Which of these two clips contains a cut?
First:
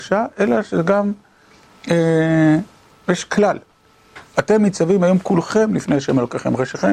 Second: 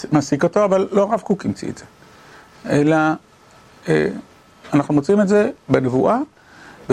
first; 1 cut; at 4.2 s

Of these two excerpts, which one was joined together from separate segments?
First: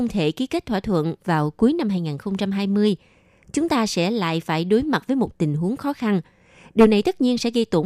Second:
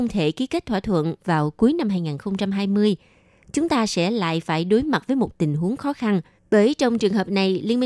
second; 1 cut; at 6.4 s

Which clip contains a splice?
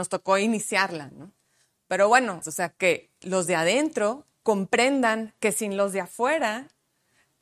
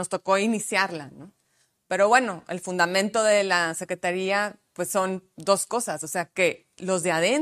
first; 2 cuts; at 2.4 s, 4.3 s

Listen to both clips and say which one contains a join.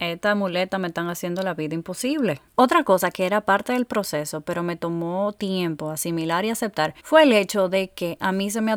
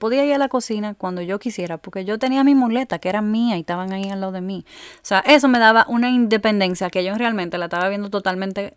first; 2 cuts; at 2.5 s, 7.0 s

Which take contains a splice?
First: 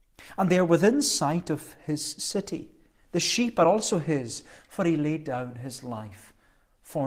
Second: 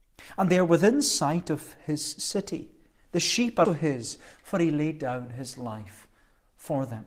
second; 1 cut; at 3.6 s

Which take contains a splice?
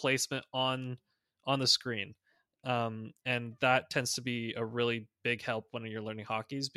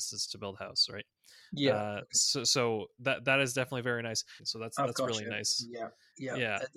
second; 1 cut; at 4.4 s

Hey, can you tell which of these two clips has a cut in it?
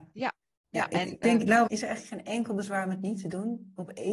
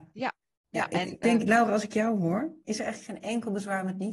first; 1 cut; at 1.7 s

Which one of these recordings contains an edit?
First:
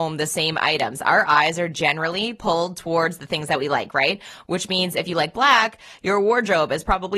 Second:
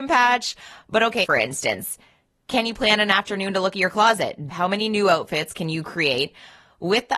second; 2 cuts; at 1.2 s, 4.5 s

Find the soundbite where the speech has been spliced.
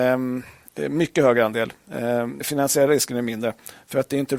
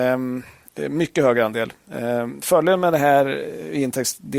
first; 1 cut; at 2.4 s

